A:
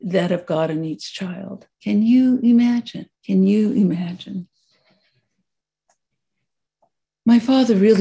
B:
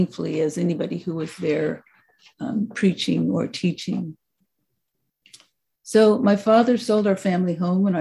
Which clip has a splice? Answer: A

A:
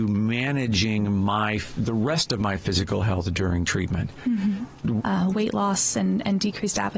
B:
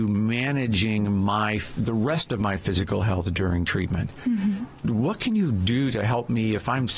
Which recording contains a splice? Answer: A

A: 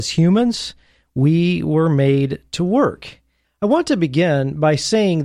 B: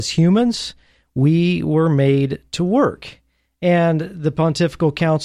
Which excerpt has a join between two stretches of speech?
A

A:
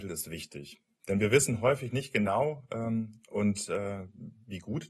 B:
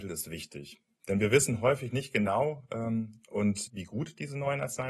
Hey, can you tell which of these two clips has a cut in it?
B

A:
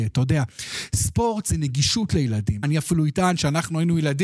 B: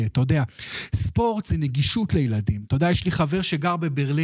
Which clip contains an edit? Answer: A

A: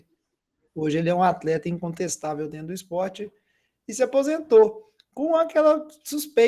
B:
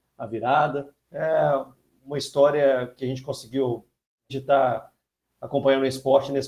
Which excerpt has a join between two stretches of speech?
B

